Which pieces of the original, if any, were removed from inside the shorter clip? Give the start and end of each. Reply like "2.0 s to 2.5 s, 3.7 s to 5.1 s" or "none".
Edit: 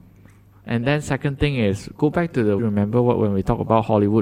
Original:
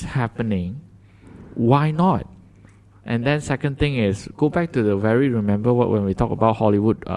5.0 s to 5.3 s

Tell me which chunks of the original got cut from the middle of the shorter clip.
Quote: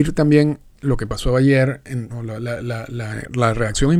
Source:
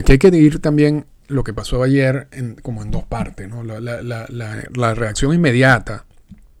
2.6 s to 3.5 s

